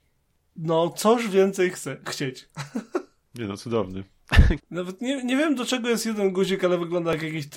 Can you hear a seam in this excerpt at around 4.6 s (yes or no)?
yes